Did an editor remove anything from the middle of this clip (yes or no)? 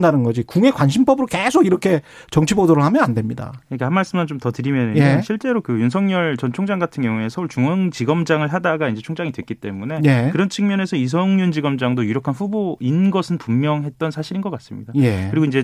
no